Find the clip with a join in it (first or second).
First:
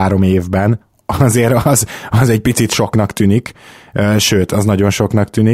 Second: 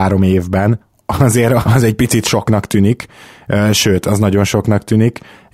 second